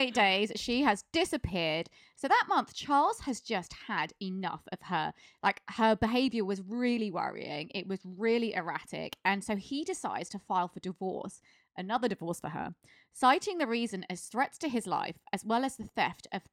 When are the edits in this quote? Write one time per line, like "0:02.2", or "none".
none

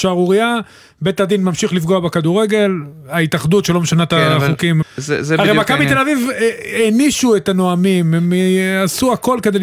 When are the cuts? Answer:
0:04.8

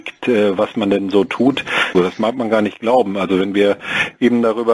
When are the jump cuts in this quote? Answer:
0:01.9

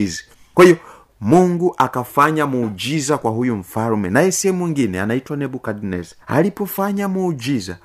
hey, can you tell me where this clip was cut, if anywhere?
0:06.2

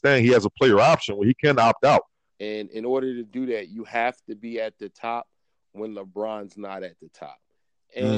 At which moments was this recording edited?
0:02.3

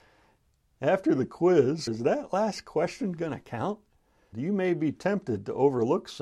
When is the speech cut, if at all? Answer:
0:01.9
0:04.3

